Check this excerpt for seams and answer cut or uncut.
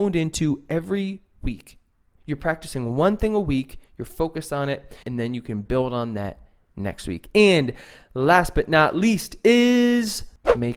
cut